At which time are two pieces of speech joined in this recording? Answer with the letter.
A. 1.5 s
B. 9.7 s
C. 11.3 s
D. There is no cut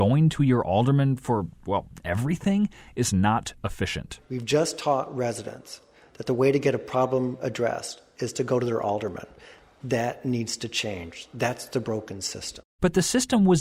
D